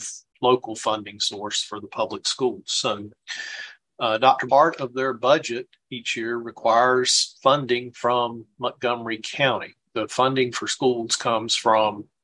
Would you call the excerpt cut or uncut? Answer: cut